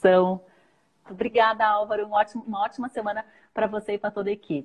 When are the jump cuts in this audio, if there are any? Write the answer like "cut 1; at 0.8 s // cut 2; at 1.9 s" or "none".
cut 1; at 1.1 s